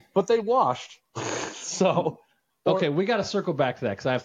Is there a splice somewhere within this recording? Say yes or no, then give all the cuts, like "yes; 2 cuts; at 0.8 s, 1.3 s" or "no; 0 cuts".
yes; 1 cut; at 2.5 s